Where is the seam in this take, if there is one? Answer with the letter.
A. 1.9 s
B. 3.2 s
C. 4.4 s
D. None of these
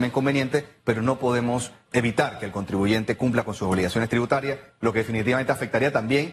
A